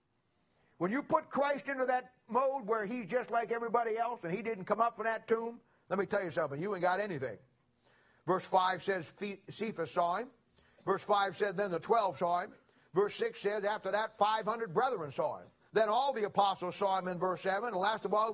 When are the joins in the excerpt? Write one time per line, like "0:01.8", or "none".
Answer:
0:15.7